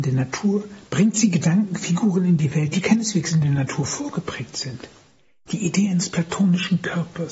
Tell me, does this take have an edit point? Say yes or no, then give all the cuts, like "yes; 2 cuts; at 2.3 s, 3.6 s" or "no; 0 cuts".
no; 0 cuts